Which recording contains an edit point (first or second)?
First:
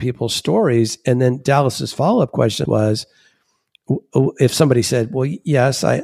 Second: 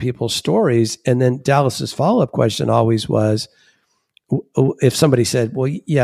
first